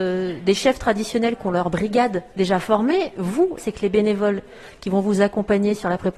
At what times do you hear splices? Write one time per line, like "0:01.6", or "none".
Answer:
0:02.3
0:03.6

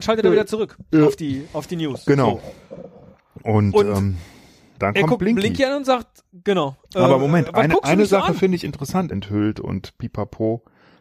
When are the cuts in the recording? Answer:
0:04.8
0:09.1

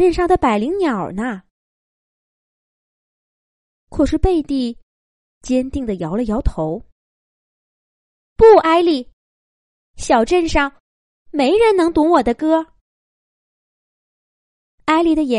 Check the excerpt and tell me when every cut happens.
none

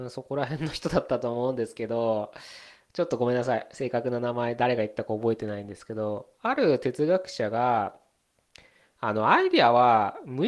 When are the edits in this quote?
none

